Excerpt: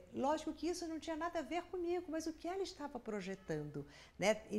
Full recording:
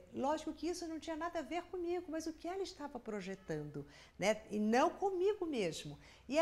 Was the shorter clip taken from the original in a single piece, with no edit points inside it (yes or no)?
yes